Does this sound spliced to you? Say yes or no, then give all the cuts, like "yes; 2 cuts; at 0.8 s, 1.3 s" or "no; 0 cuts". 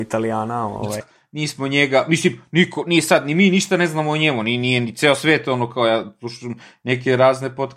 yes; 1 cut; at 1.0 s